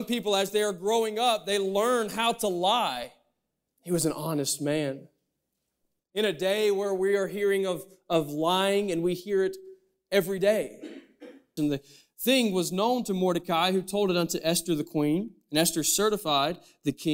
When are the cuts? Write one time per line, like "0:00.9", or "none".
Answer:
0:03.7
0:11.6